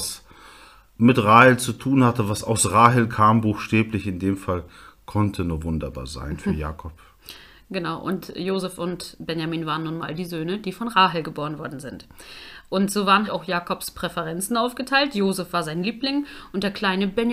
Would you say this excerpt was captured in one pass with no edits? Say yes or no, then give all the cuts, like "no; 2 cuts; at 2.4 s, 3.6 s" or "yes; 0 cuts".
no; 1 cut; at 13.3 s